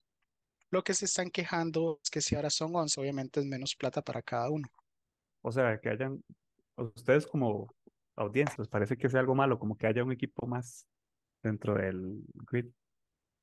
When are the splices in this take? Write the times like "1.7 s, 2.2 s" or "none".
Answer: 2.9 s, 5.3 s, 8.6 s